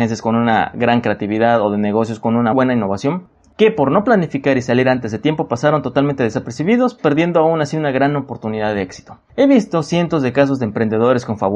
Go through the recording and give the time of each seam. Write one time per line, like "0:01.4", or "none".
0:02.5
0:09.3